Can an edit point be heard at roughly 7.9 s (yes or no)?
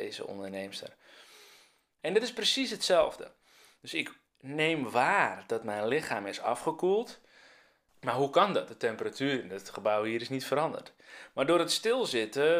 yes